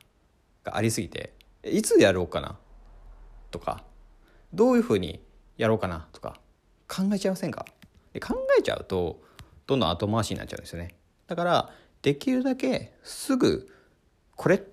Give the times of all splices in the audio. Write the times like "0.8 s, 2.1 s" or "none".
11.2 s